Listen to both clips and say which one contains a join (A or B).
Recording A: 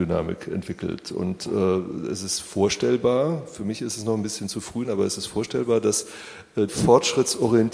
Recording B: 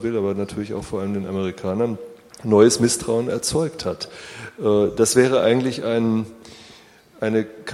A